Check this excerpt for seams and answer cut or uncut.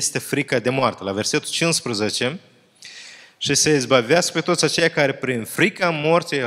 uncut